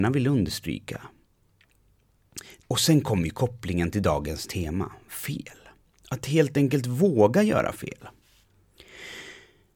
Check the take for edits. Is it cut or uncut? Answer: cut